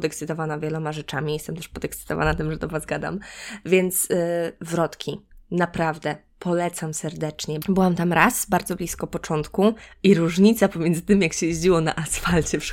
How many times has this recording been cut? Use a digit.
1